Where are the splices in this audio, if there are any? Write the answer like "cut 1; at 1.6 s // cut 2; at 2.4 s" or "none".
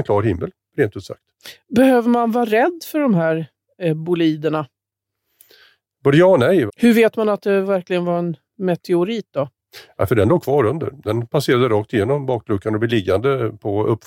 cut 1; at 6.7 s